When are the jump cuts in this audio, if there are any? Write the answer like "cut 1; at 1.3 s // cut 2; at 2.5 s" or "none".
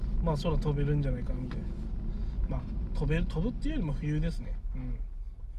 none